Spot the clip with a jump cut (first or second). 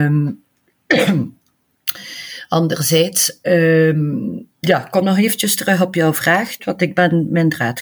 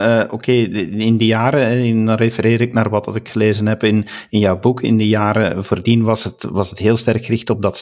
first